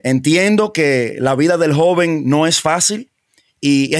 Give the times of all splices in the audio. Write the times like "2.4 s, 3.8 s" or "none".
none